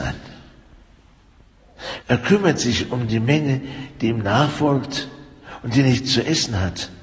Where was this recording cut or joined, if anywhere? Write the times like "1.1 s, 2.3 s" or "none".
2.0 s